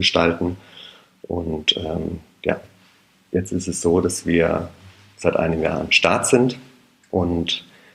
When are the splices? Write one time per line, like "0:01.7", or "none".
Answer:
none